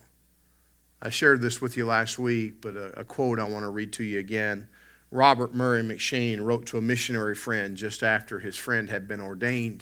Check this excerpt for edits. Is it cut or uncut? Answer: uncut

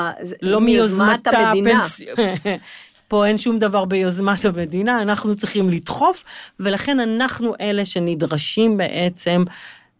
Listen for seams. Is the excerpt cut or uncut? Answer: cut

